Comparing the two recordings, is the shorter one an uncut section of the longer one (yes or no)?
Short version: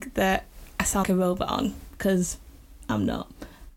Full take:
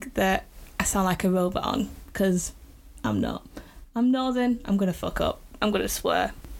no